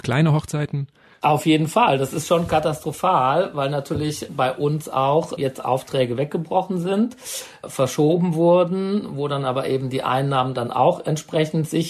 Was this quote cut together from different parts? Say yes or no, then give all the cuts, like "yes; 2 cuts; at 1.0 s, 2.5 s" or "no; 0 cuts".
no; 0 cuts